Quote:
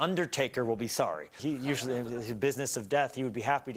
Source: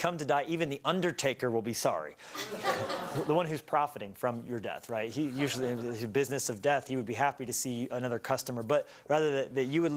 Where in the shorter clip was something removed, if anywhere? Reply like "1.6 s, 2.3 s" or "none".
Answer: 1.4 s